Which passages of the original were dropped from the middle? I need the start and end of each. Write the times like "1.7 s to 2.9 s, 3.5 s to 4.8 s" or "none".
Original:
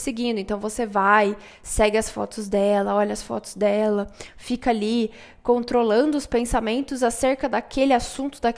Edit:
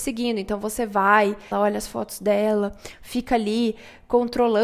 1.5 s to 2.9 s